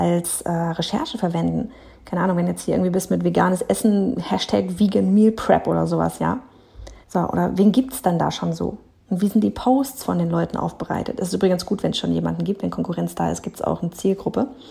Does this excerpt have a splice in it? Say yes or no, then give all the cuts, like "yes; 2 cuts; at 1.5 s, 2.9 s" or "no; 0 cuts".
yes; 1 cut; at 7.0 s